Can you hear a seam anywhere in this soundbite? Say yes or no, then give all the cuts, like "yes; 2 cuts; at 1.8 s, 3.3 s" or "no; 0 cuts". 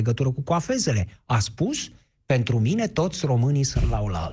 no; 0 cuts